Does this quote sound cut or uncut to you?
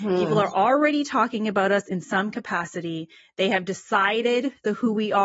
uncut